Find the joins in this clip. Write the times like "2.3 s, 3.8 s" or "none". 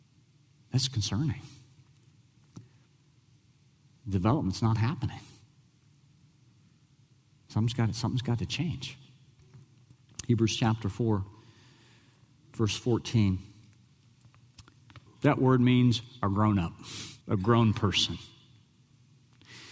15.1 s, 17.2 s